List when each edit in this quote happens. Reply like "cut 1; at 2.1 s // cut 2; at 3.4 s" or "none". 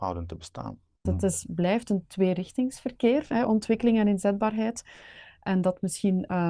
cut 1; at 1.1 s